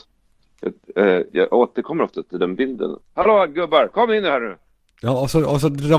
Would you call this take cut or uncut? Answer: cut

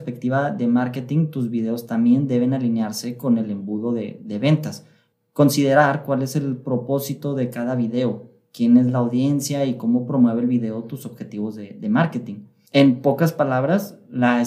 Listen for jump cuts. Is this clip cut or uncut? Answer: uncut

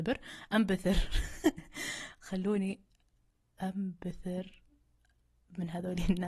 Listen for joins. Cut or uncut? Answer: uncut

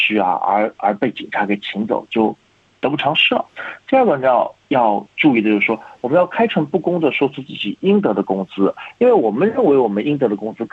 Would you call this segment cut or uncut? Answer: uncut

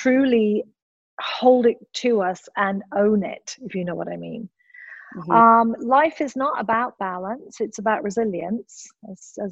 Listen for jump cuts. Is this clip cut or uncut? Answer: uncut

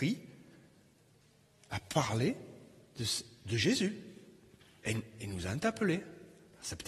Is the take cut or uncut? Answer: uncut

